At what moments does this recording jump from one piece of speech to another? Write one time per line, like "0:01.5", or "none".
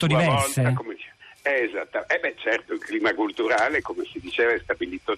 none